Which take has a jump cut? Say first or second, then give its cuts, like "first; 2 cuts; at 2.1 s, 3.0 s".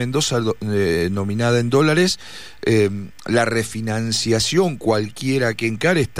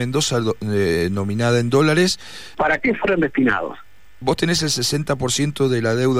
second; 2 cuts; at 2.5 s, 4.2 s